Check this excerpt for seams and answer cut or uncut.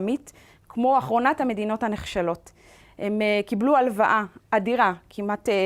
uncut